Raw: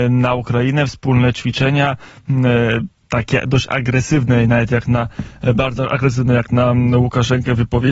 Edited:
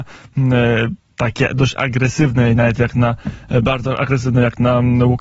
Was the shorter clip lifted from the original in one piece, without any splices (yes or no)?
yes